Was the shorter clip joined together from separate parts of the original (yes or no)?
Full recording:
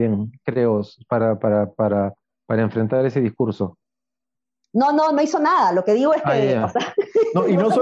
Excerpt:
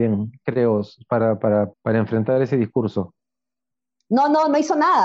yes